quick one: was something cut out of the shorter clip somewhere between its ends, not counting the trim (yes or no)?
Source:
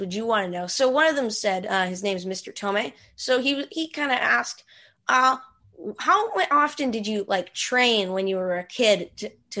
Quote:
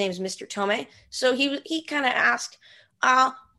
no